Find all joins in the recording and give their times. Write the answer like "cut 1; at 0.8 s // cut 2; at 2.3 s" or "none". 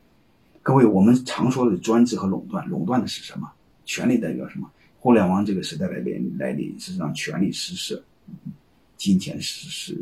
cut 1; at 4.9 s